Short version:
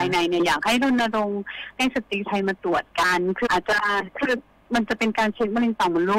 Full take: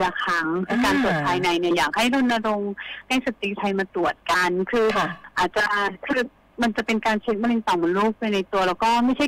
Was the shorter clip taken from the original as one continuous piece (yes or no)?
no